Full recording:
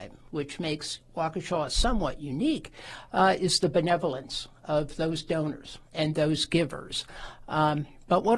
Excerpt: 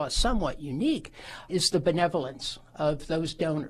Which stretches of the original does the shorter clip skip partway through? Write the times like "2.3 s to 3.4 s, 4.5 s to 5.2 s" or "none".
3.1 s to 3.4 s